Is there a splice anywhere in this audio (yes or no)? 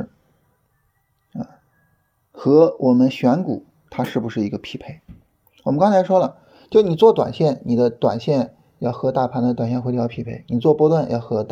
no